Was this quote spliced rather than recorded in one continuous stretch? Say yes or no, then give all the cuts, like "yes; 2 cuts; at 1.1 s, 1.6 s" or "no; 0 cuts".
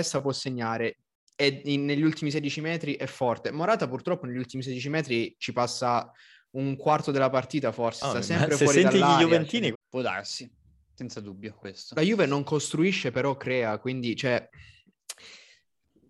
yes; 1 cut; at 9.7 s